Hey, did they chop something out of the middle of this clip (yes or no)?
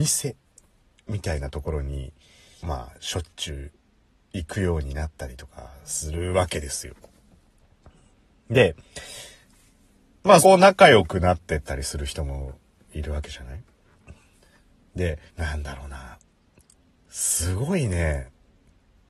yes